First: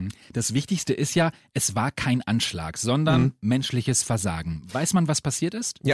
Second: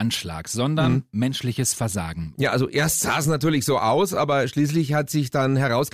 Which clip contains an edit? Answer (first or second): second